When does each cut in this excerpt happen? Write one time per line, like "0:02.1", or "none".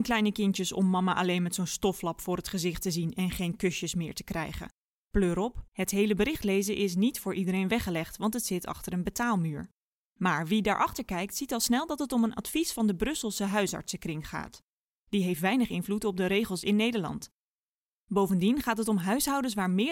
0:05.7

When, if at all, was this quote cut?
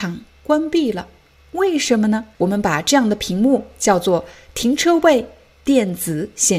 0:02.3

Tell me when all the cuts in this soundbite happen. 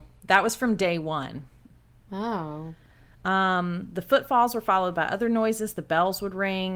none

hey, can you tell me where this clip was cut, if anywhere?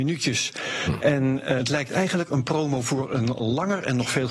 0:01.6

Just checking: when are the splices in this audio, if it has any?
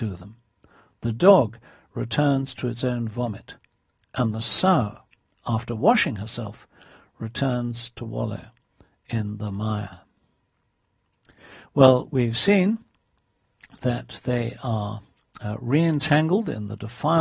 none

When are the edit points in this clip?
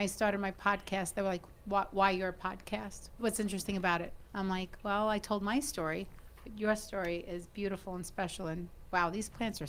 0:03.2
0:04.3

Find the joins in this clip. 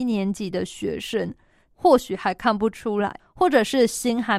0:01.7
0:03.2

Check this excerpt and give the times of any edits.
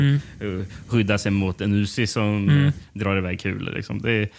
none

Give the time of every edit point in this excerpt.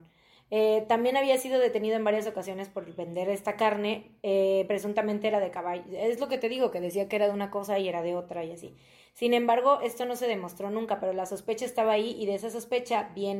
none

